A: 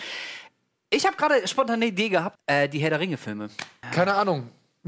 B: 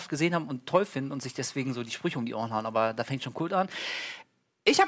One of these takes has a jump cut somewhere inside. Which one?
A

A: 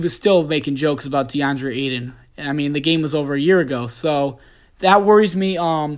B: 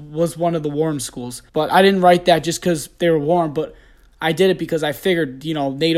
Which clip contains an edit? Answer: B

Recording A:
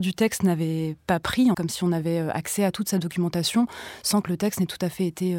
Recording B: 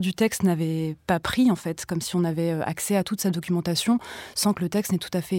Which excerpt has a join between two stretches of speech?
A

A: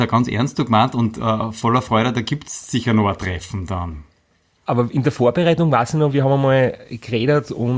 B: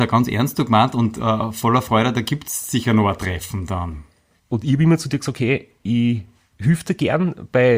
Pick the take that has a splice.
B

